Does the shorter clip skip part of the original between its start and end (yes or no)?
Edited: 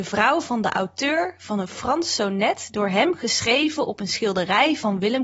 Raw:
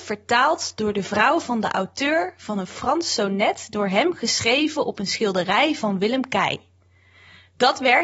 no